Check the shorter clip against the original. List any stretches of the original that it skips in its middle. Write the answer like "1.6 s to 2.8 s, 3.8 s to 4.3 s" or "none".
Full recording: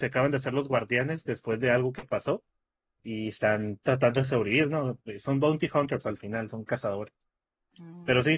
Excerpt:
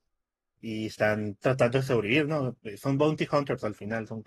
none